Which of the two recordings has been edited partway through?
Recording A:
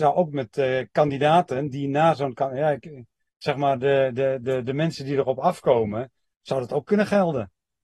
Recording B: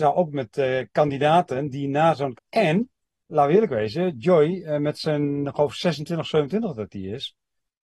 B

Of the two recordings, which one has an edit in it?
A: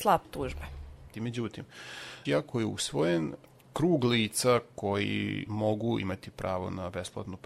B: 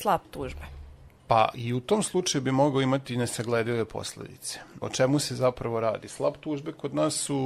A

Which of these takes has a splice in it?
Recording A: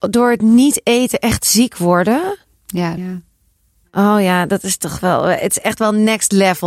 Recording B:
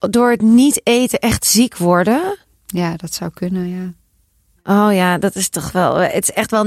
A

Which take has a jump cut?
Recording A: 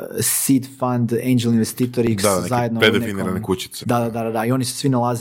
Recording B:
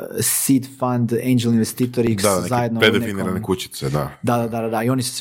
A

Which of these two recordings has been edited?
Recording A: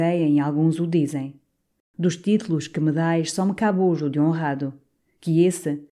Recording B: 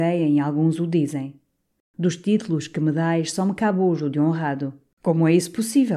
B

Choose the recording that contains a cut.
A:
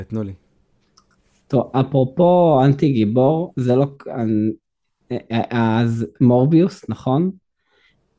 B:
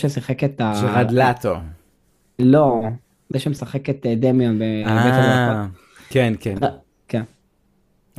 B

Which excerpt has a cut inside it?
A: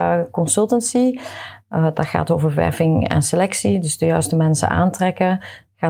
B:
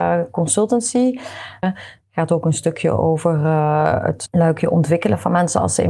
B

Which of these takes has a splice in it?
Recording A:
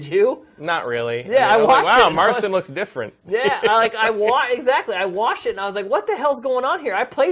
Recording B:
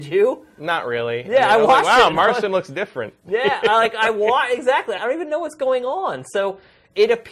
B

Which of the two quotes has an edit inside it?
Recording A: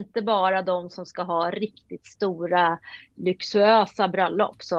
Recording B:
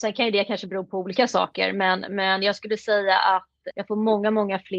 B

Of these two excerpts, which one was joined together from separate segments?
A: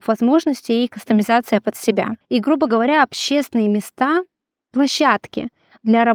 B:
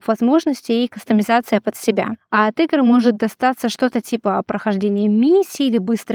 A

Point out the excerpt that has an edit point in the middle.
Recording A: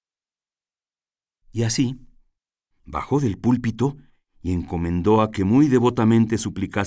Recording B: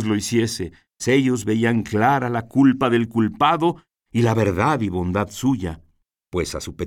B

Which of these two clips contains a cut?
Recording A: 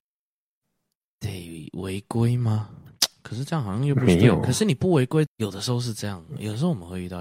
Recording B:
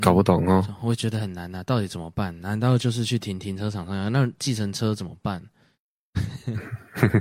A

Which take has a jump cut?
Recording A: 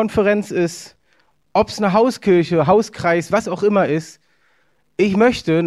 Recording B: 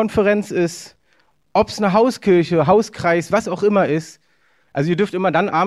B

